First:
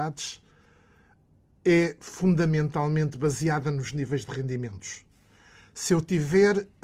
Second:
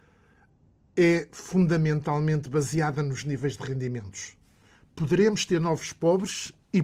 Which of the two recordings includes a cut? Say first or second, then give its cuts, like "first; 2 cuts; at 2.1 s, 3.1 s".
second; 1 cut; at 4.8 s